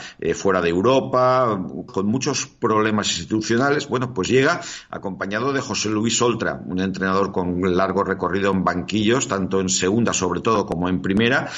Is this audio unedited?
no; 1 cut; at 1.9 s

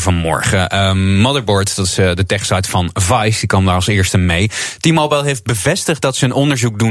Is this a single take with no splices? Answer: yes; 0 cuts

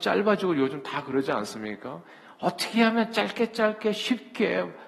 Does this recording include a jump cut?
no; 0 cuts

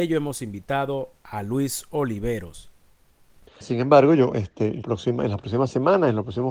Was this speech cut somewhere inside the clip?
yes; 2 cuts; at 3.5 s, 4.8 s

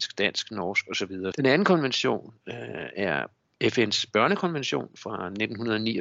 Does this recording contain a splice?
yes; 1 cut; at 1.3 s

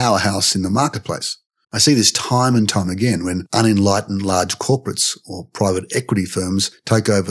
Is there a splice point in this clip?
yes; 1 cut; at 1.6 s

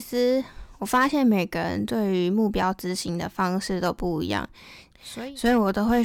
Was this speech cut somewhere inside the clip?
yes; 1 cut; at 4.9 s

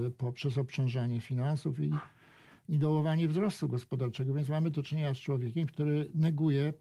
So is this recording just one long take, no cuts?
yes; 0 cuts

